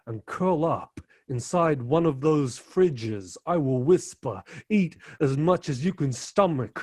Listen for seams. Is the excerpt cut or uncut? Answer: uncut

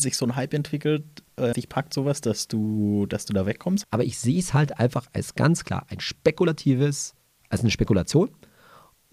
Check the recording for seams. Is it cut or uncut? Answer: cut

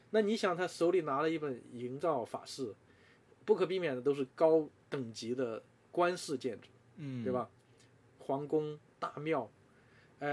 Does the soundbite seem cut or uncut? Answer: uncut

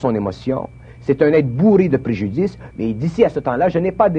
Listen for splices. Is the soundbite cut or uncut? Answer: cut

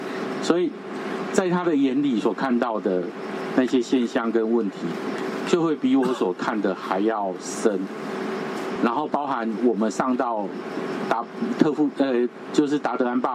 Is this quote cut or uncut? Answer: uncut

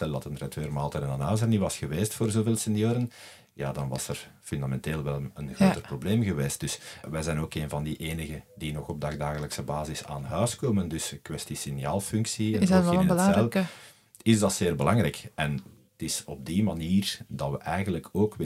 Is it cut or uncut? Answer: cut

